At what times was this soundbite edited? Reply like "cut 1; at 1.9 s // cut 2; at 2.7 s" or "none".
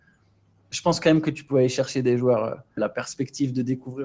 cut 1; at 2.8 s